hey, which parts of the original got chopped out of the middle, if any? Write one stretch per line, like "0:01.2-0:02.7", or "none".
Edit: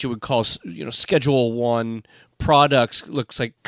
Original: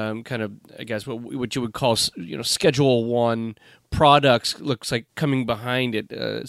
none